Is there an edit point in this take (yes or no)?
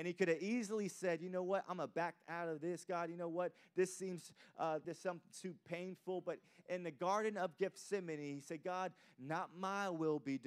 yes